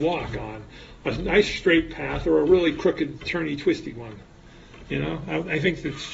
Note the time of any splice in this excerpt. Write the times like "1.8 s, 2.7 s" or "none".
none